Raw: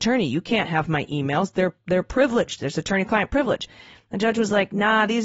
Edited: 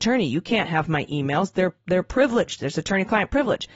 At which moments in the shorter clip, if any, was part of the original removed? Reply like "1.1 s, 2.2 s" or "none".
none